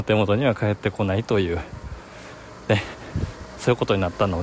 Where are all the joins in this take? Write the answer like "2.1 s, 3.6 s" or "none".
none